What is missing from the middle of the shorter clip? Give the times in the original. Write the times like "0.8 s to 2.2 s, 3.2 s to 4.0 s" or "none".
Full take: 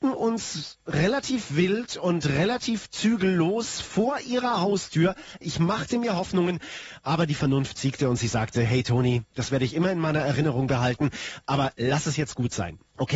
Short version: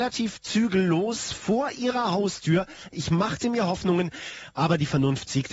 none